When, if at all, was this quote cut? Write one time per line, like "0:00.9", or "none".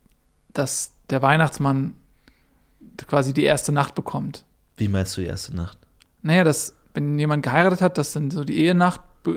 none

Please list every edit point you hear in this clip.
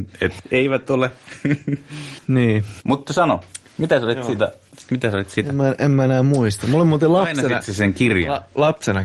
none

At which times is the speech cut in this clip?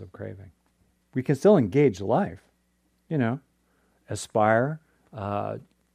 0:01.0

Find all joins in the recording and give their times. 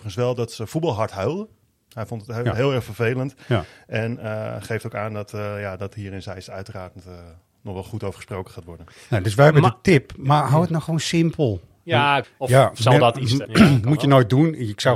0:02.3
0:12.2
0:13.4

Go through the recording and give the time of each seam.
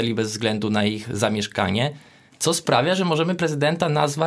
0:02.3

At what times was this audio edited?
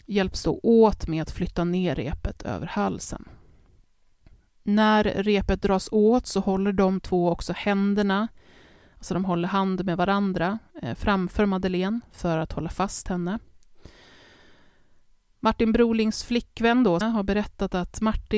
0:17.0

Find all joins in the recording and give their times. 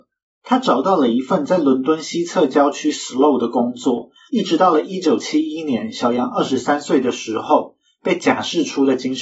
0:04.3

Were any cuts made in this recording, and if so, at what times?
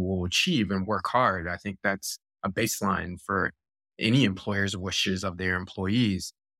none

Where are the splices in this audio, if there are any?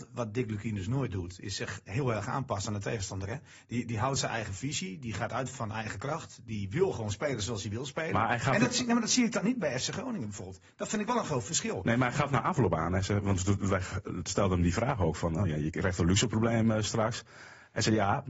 none

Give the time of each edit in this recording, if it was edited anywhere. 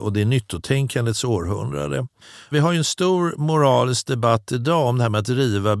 0:02.5

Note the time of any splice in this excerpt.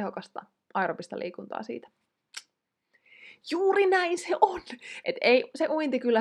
0:05.0

